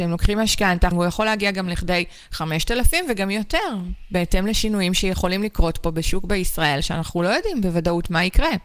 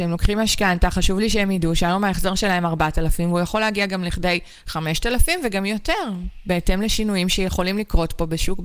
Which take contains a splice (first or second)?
first